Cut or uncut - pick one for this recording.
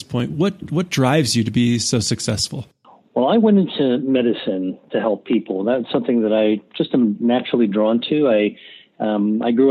uncut